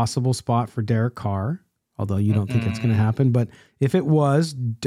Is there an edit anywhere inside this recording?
no; 0 cuts

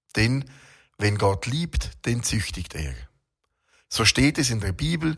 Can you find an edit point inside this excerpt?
no; 0 cuts

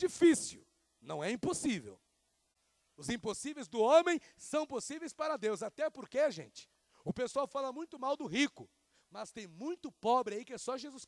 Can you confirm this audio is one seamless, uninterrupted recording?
yes; 0 cuts

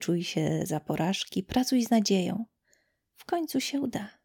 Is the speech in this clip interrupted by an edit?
no; 0 cuts

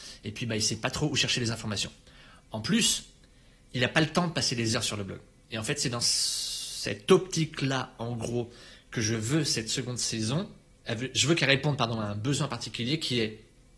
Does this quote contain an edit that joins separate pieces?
no; 0 cuts

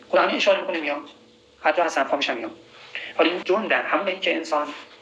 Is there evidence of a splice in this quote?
yes; 1 cut; at 3.4 s

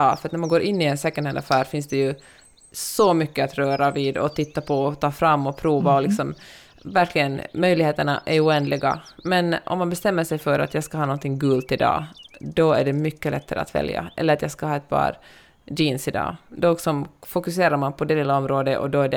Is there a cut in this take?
no; 0 cuts

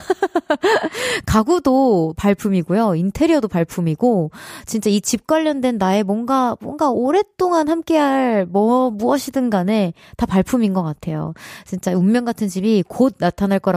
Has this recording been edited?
no; 0 cuts

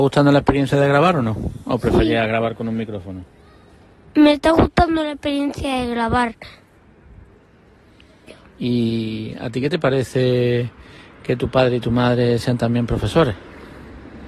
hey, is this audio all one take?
yes; 0 cuts

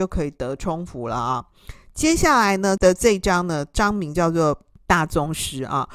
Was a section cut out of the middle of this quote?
no; 0 cuts

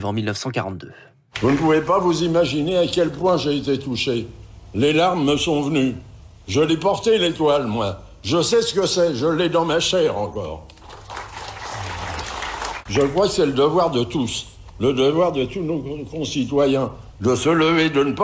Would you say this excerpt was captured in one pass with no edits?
yes; 0 cuts

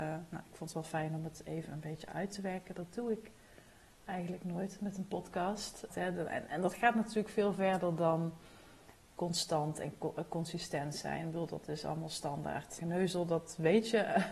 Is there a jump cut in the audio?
yes; 2 cuts; at 5.9 s, 12.8 s

